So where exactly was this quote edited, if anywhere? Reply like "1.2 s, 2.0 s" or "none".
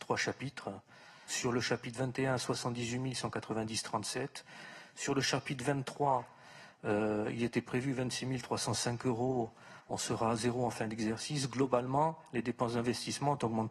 1.3 s